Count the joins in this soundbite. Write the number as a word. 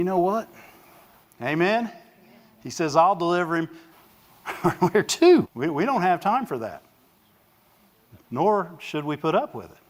three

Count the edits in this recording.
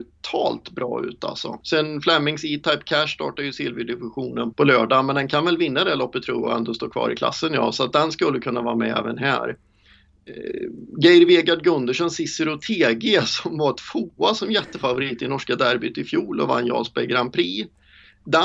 two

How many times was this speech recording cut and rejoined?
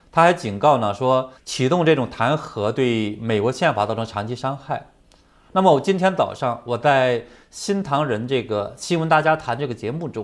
two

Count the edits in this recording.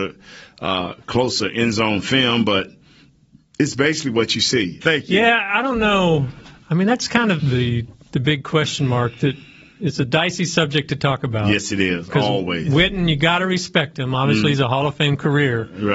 two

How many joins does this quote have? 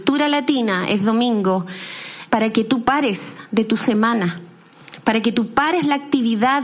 one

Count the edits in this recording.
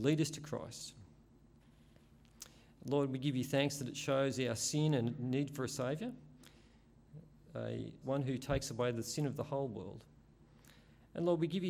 one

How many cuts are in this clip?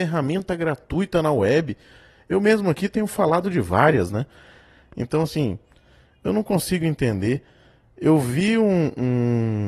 zero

